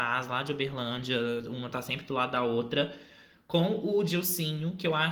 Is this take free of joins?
yes; 0 cuts

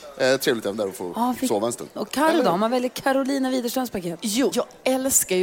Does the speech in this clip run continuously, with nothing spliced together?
no; 2 cuts; at 2.0 s, 4.5 s

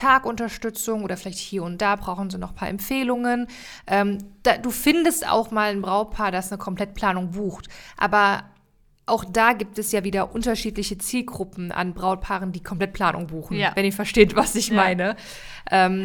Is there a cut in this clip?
no; 0 cuts

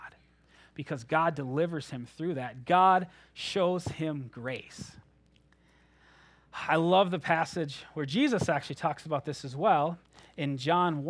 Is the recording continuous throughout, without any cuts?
yes; 0 cuts

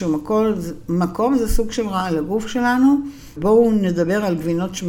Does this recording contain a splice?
yes; 1 cut; at 3.4 s

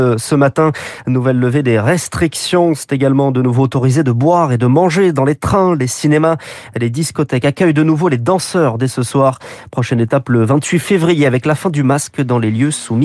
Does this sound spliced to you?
no; 0 cuts

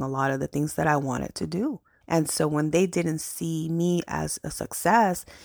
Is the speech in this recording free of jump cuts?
no; 1 cut; at 2.0 s

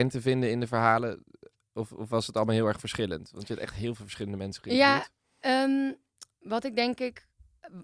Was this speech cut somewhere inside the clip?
no; 0 cuts

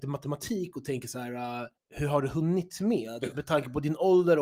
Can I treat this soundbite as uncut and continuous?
no; 2 cuts; at 1.8 s, 3.3 s

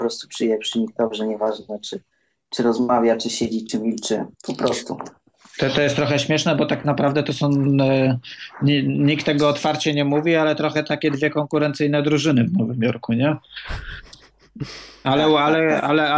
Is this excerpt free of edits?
no; 1 cut; at 4.3 s

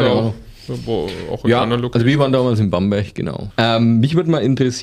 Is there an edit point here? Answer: yes; 1 cut; at 3.5 s

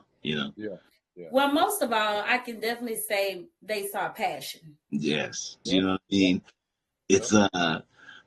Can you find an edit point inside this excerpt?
yes; 1 cut; at 5.7 s

